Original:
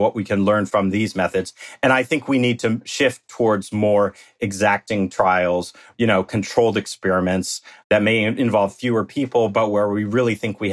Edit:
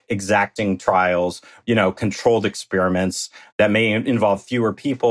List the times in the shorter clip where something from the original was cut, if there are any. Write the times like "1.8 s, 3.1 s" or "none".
none